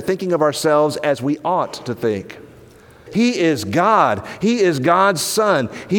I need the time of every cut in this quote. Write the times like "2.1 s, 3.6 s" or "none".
3.1 s